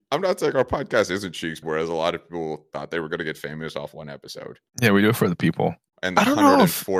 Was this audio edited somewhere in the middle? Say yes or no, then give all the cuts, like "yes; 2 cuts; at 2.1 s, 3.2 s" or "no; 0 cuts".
yes; 3 cuts; at 1.6 s, 4.7 s, 5.9 s